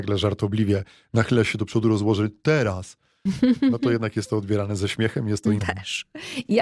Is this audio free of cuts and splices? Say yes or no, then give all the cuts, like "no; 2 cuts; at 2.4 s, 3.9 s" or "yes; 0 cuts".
no; 1 cut; at 5.6 s